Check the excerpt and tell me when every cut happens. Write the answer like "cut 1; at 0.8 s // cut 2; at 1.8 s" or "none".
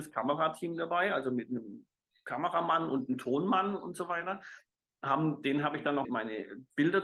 cut 1; at 6.1 s